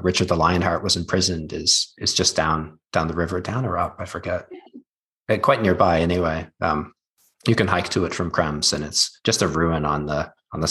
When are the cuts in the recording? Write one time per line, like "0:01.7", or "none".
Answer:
none

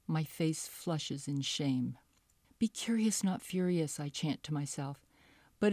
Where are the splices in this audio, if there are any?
0:02.4

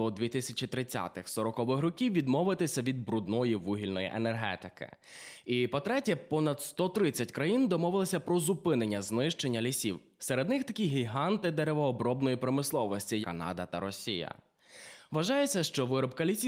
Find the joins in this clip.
0:13.2

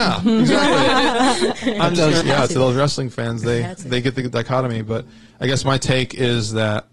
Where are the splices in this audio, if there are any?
0:02.2

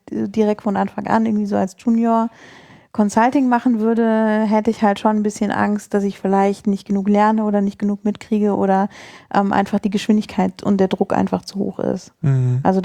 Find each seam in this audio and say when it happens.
none

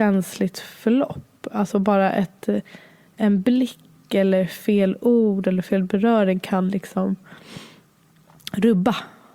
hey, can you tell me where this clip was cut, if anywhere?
none

